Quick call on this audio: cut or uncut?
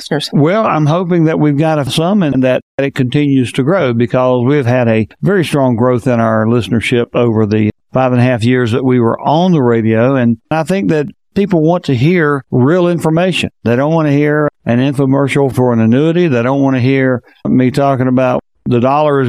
uncut